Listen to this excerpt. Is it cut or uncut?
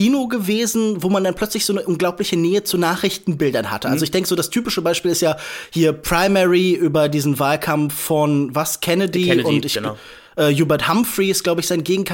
uncut